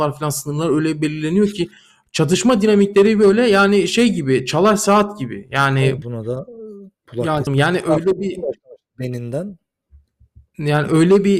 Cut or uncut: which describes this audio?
cut